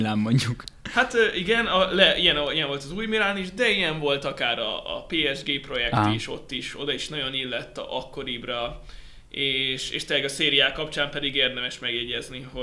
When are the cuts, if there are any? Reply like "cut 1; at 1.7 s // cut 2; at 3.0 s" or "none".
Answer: none